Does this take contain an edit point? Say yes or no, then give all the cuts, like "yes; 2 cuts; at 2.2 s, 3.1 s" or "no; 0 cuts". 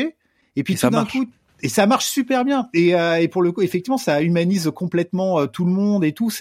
no; 0 cuts